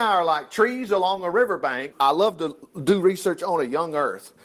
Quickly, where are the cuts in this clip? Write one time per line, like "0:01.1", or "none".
0:01.9